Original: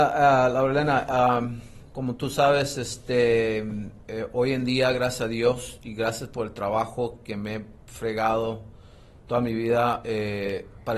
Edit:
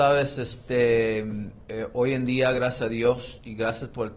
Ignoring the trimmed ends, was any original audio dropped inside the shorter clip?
no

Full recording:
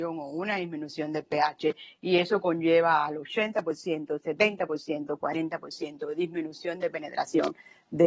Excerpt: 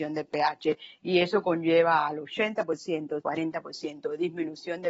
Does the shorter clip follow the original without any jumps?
no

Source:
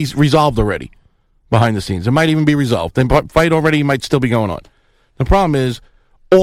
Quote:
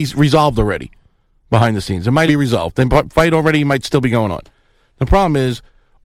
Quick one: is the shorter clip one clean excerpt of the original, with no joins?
no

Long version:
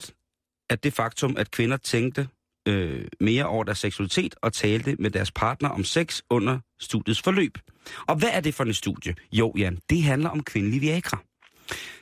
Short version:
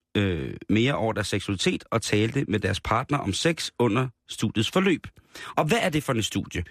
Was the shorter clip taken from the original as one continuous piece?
yes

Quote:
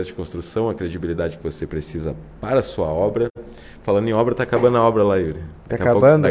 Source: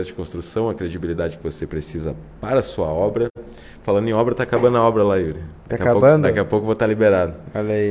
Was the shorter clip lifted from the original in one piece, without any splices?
yes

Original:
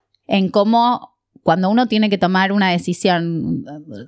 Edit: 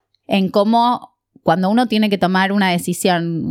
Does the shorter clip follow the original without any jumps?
yes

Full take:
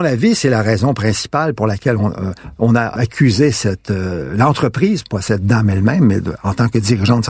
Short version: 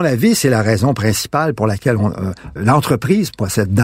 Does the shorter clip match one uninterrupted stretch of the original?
no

